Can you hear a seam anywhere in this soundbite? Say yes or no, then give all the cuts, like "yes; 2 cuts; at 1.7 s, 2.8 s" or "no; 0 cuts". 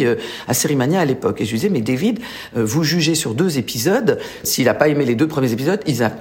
yes; 1 cut; at 4.4 s